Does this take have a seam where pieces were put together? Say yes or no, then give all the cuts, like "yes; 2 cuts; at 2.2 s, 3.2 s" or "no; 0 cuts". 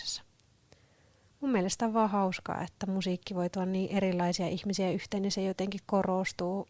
no; 0 cuts